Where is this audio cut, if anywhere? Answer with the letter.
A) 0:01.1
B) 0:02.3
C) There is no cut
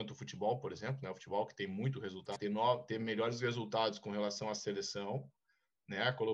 B